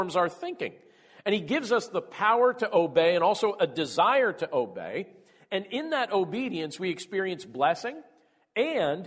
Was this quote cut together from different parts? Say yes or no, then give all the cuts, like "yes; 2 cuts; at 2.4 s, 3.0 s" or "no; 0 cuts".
no; 0 cuts